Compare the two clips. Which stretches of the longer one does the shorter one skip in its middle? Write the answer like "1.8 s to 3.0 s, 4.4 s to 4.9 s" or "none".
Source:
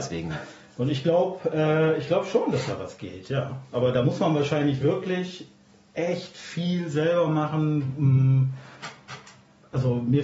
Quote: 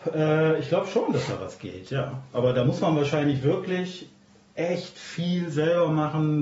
none